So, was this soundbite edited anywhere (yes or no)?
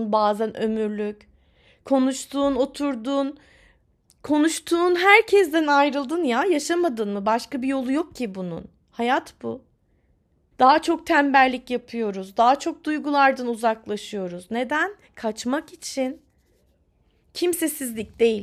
yes